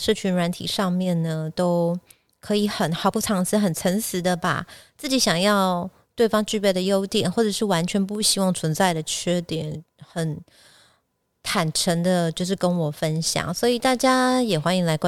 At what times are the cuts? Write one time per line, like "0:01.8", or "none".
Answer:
none